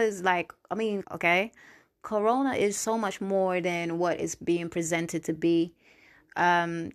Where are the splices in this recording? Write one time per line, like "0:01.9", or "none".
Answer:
0:01.0